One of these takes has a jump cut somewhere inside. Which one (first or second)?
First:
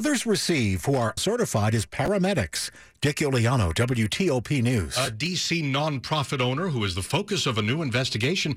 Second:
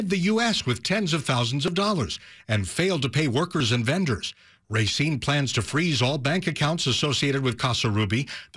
first